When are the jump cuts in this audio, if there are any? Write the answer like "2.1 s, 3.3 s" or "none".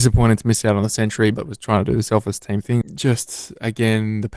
2.8 s